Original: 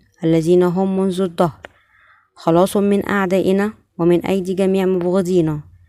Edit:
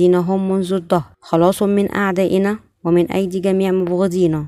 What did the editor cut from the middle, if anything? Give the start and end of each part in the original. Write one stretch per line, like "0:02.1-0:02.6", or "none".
0:01.6-0:02.3